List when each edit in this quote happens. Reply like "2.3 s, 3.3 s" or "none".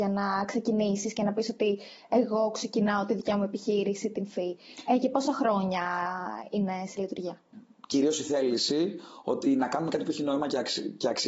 7.5 s